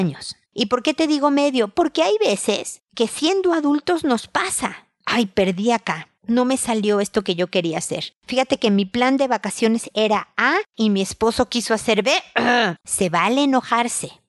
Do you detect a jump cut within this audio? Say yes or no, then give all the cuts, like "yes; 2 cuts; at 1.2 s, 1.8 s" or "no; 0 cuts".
yes; 1 cut; at 12.8 s